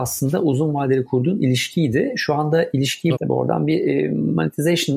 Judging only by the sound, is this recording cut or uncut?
cut